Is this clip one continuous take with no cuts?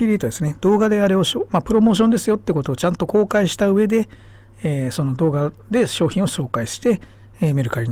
yes; 0 cuts

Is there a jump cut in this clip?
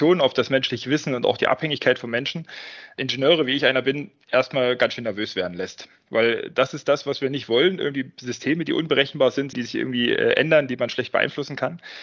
yes; 1 cut; at 9.5 s

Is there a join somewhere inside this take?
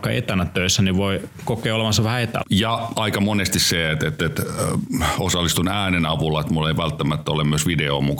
yes; 1 cut; at 2.4 s

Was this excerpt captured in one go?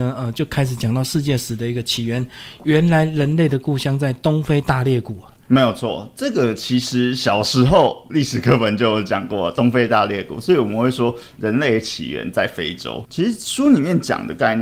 no; 1 cut; at 13.0 s

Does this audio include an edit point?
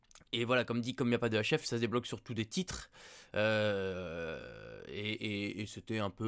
no; 0 cuts

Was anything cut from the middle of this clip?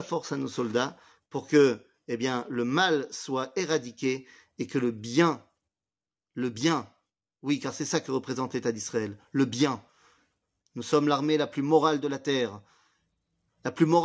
no; 0 cuts

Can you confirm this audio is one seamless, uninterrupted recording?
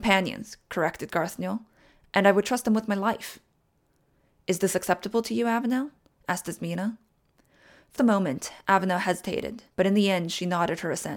no; 2 cuts; at 8.0 s, 9.7 s

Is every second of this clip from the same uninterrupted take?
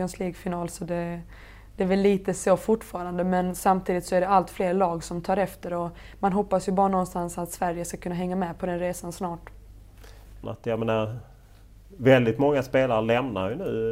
no; 1 cut; at 10.4 s

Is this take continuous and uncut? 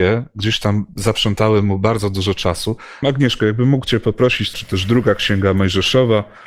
no; 2 cuts; at 3.0 s, 4.5 s

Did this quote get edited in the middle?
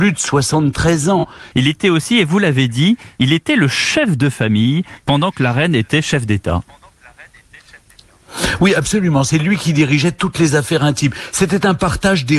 yes; 1 cut; at 1.5 s

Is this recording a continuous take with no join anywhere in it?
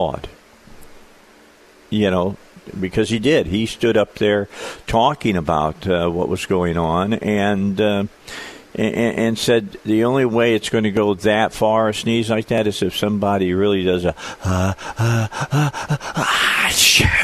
yes; 0 cuts

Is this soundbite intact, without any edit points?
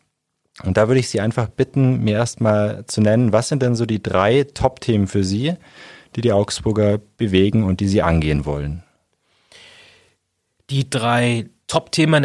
yes; 0 cuts

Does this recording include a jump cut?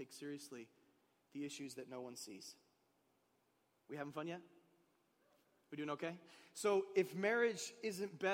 no; 0 cuts

